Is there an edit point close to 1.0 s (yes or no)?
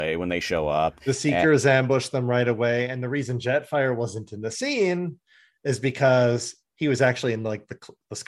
no